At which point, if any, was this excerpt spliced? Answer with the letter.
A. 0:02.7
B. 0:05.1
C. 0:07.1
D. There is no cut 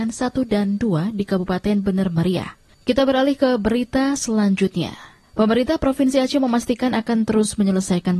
A